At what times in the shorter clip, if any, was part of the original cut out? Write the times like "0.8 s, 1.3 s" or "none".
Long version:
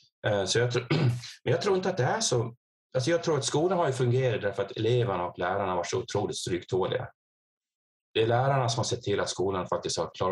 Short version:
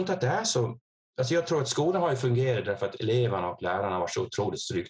none

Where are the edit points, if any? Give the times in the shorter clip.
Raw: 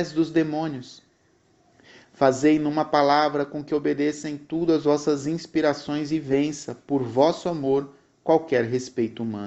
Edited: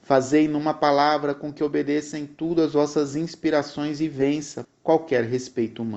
4.6 s

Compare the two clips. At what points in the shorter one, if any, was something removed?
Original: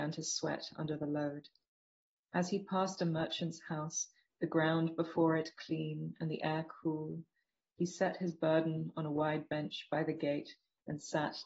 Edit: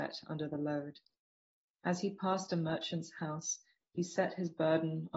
3.8 s

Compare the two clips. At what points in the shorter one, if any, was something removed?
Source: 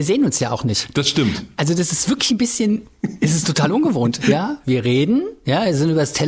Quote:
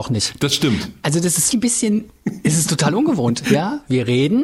1.5 s

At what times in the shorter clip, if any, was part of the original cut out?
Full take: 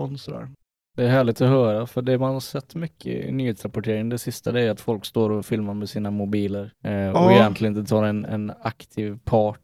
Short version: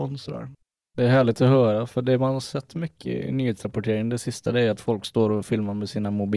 none

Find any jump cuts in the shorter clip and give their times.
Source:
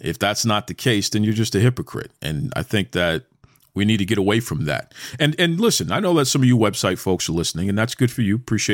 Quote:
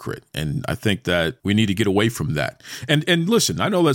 1.4 s

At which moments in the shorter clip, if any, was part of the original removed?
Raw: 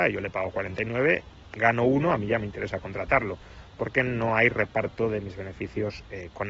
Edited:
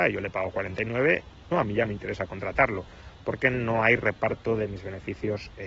1.5 s

